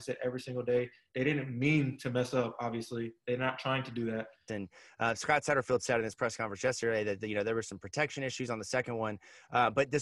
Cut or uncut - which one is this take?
cut